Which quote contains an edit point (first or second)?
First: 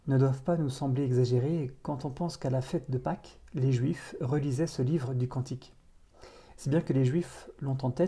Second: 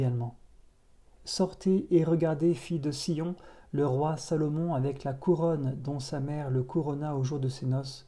second